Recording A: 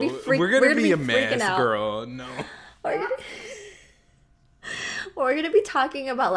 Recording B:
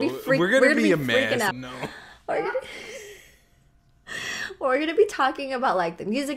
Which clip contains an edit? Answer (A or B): B